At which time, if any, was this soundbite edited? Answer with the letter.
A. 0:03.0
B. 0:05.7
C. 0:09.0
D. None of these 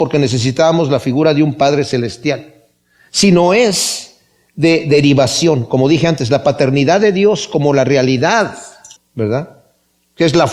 C